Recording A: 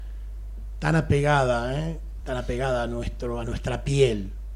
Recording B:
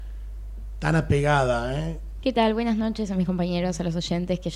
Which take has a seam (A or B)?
B